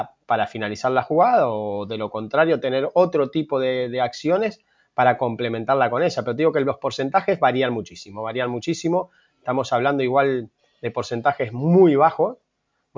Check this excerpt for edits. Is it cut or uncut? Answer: uncut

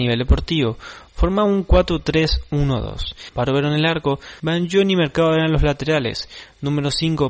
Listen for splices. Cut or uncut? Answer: cut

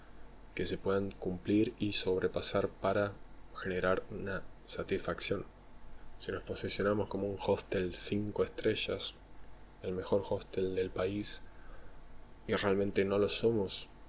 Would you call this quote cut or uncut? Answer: uncut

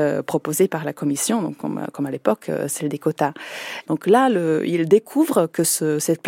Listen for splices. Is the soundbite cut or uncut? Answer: cut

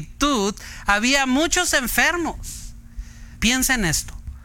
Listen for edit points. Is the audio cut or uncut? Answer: cut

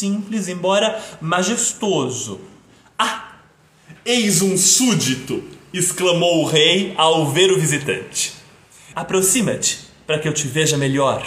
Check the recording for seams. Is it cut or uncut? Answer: cut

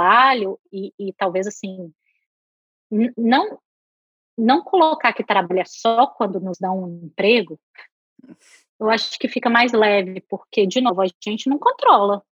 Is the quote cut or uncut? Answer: uncut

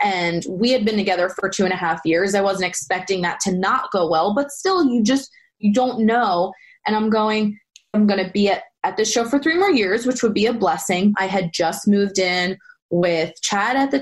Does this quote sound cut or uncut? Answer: cut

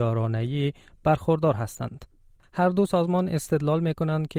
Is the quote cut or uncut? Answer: cut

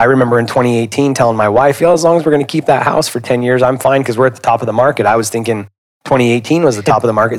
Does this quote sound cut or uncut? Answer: uncut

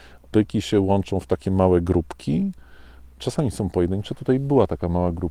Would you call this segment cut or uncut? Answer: uncut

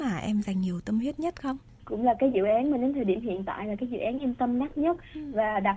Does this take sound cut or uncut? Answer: cut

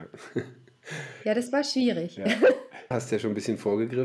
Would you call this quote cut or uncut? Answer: cut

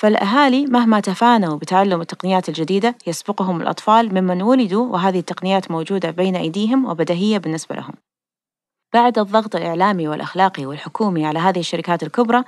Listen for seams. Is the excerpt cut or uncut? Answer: uncut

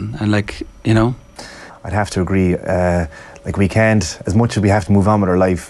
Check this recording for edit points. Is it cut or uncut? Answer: cut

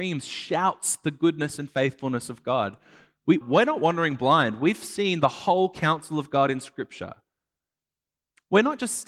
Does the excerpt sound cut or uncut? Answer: cut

